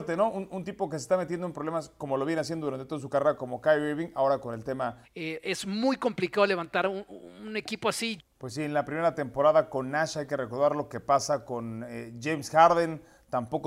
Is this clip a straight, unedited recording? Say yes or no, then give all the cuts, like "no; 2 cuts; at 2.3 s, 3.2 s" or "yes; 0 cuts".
no; 2 cuts; at 5.0 s, 8.2 s